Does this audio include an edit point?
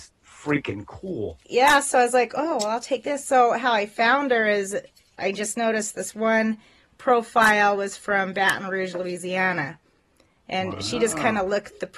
no; 0 cuts

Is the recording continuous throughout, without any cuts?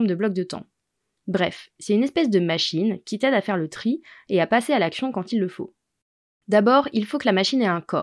no; 1 cut; at 6.3 s

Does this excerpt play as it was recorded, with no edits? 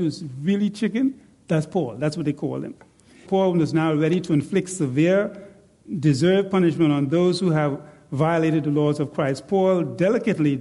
no; 1 cut; at 3.3 s

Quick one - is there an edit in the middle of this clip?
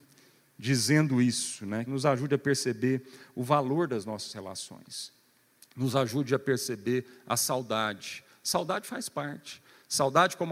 yes; 1 cut; at 1.9 s

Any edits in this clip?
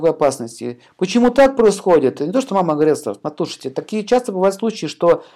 no; 0 cuts

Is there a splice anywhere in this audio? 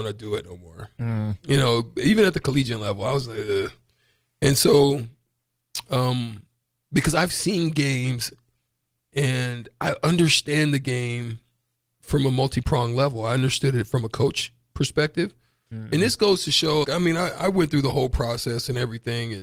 yes; 2 cuts; at 15.7 s, 16.8 s

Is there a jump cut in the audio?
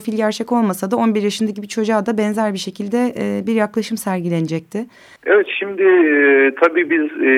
yes; 1 cut; at 5.2 s

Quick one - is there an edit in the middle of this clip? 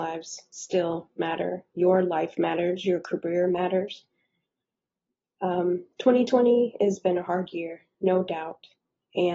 no; 0 cuts

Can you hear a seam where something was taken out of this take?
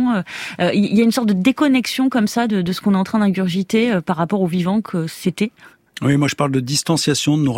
no; 0 cuts

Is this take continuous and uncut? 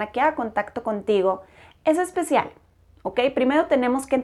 yes; 0 cuts

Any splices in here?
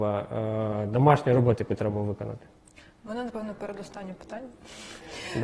no; 0 cuts

